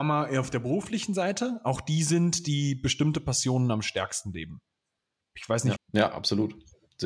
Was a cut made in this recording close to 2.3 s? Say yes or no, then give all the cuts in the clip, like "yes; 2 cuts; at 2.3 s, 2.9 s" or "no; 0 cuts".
no; 1 cut; at 5.8 s